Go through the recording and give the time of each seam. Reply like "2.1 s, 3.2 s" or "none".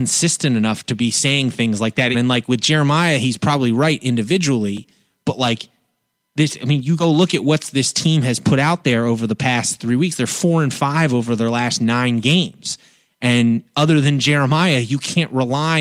2.1 s